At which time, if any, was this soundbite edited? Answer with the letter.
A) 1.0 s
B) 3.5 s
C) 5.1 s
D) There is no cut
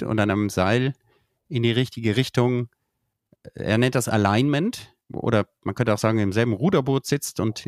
C